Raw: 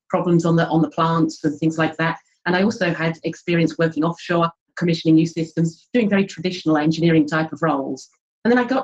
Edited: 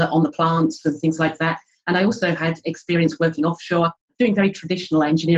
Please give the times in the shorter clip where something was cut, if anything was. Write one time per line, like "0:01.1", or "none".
0:04.1